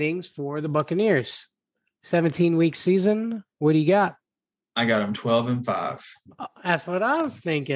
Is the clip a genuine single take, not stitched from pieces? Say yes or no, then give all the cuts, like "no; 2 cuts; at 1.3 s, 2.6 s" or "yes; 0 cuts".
yes; 0 cuts